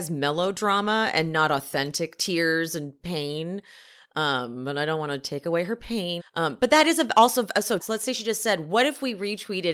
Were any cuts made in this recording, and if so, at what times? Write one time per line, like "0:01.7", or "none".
0:06.2
0:07.8